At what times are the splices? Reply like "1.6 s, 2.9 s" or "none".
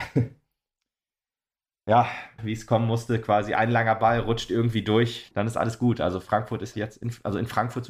2.4 s, 5.3 s, 6.7 s